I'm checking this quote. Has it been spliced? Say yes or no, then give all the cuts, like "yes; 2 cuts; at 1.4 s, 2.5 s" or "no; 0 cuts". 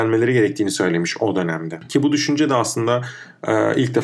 no; 0 cuts